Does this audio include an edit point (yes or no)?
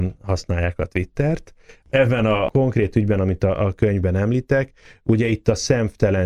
no